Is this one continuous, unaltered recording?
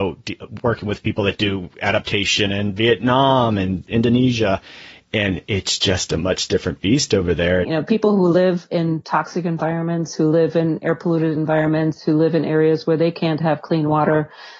no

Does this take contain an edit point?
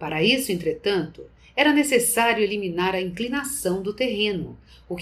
no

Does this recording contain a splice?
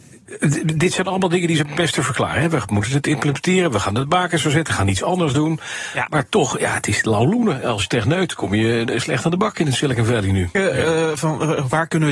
yes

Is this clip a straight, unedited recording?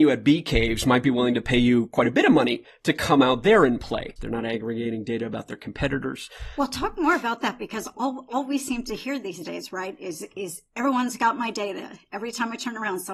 no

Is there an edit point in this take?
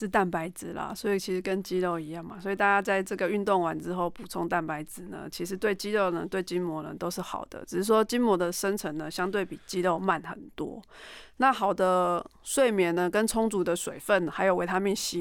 no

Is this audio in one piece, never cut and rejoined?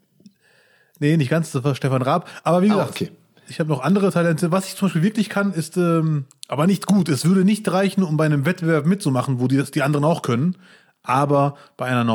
yes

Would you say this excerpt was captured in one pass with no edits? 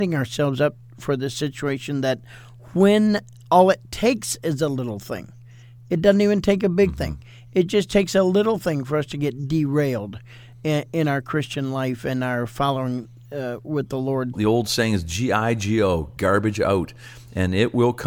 no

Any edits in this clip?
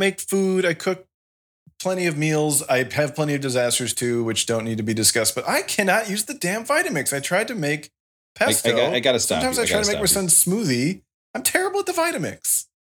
no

